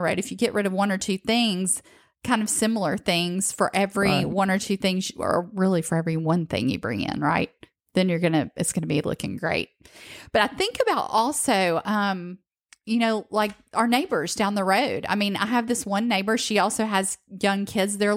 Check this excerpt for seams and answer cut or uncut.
uncut